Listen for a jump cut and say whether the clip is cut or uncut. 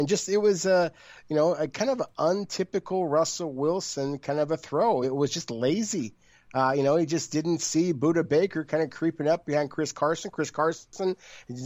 uncut